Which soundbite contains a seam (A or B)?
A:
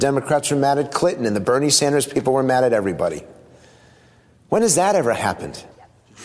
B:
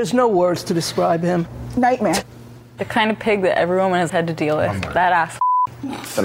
B